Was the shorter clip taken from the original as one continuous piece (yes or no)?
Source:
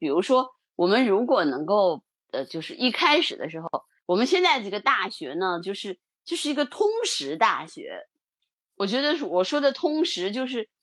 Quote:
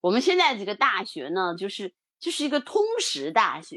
yes